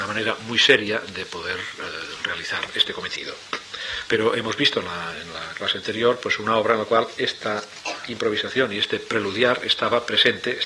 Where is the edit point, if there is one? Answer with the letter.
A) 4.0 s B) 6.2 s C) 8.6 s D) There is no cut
A